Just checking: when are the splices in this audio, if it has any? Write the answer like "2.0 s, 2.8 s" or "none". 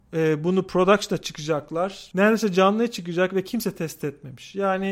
2.1 s